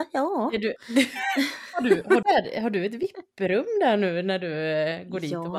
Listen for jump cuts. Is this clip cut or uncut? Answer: cut